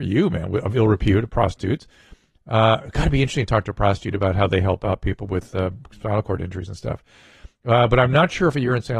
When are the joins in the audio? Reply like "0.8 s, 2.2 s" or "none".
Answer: none